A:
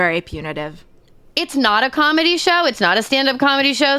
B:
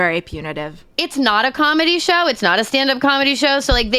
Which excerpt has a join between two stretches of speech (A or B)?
B